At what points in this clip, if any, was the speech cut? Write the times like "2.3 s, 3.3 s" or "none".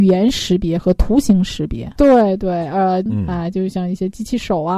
2.0 s, 3.1 s